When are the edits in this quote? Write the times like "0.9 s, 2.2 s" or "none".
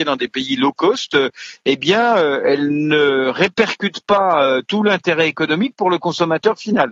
none